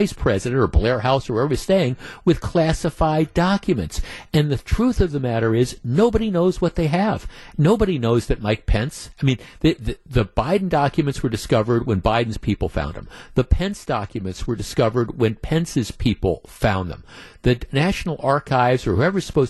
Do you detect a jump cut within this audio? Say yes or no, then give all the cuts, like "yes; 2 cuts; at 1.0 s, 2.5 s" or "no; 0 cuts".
no; 0 cuts